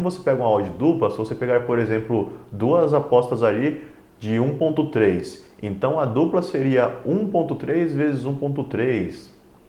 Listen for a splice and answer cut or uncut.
uncut